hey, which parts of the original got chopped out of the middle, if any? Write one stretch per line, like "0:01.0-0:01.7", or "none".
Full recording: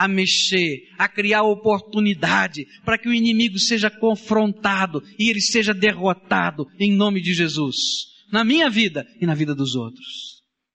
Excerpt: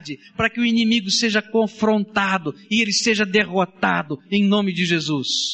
none